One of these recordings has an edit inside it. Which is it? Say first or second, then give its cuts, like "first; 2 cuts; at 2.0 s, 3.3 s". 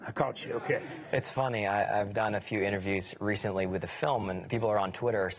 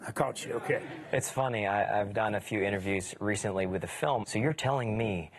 second; 1 cut; at 4.2 s